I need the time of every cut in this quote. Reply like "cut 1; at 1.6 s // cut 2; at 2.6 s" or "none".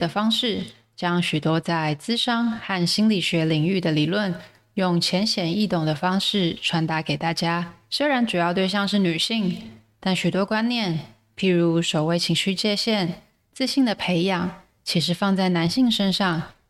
none

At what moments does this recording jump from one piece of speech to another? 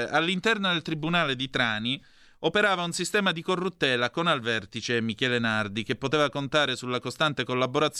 none

